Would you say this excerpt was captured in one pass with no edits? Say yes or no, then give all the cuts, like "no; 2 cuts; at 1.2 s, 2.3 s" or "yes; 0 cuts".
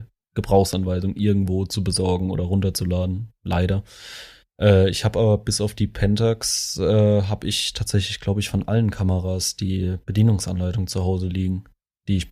yes; 0 cuts